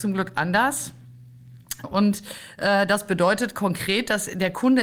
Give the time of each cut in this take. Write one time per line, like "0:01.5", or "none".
0:01.8